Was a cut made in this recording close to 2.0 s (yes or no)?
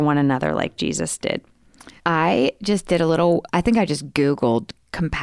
yes